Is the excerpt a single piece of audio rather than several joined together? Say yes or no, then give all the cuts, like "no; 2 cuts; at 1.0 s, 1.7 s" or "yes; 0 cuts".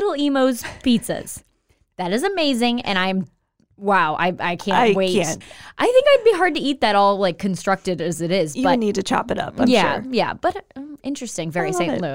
no; 1 cut; at 5.4 s